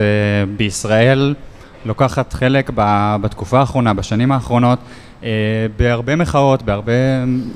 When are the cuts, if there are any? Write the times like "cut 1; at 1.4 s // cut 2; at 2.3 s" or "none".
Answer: none